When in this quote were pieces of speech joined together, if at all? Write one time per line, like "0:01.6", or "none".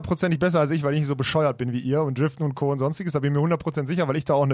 none

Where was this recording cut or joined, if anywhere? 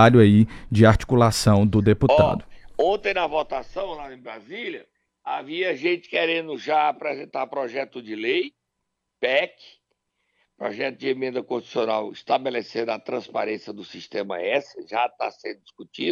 none

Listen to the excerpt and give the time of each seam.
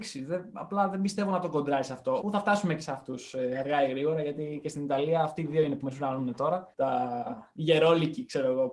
0:02.2
0:06.7

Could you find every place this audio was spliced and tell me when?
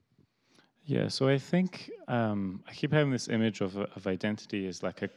none

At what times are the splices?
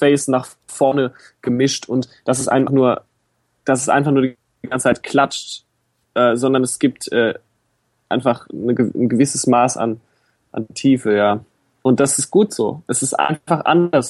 0:02.7

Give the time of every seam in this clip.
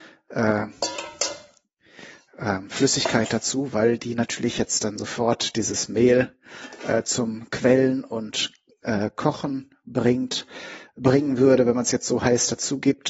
none

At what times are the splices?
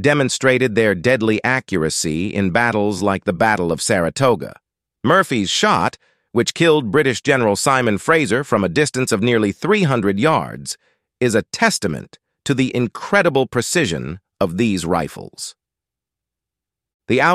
none

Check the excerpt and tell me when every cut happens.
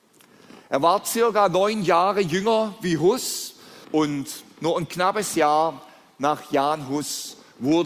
0:03.8

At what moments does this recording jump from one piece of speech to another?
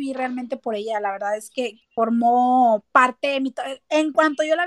0:01.8

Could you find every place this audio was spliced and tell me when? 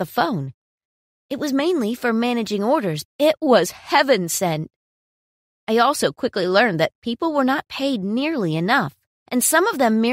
0:03.0
0:05.5

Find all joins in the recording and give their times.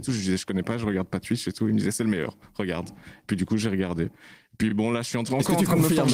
none

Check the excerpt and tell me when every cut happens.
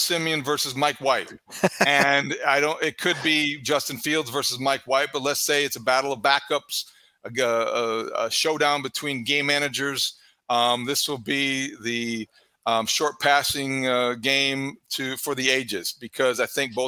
none

